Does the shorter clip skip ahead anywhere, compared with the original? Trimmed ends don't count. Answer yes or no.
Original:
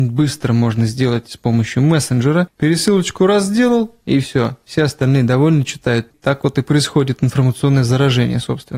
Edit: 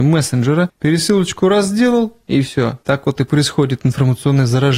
yes